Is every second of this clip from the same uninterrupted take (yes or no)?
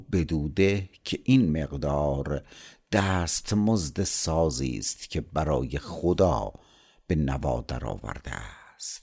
yes